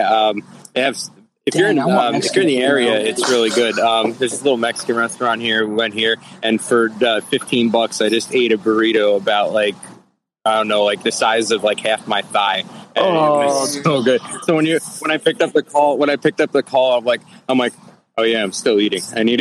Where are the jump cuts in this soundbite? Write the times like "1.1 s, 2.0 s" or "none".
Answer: none